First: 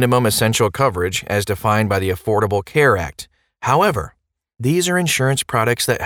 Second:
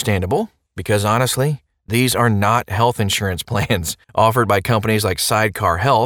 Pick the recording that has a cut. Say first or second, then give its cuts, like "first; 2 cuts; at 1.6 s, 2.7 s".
second; 1 cut; at 4.0 s